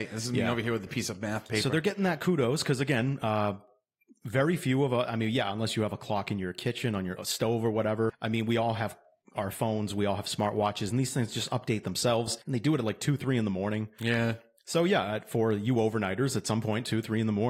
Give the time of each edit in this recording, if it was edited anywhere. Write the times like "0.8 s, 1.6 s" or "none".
7.2 s